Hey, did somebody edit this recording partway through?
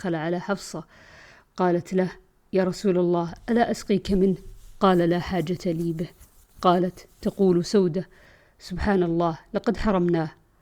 no; 0 cuts

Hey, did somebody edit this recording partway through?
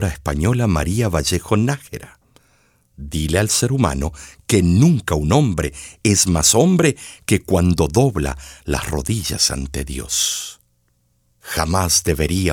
no; 0 cuts

